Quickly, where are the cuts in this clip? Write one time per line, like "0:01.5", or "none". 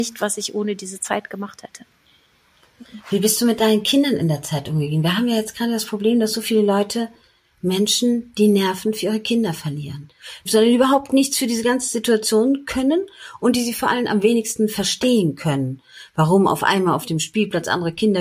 0:10.4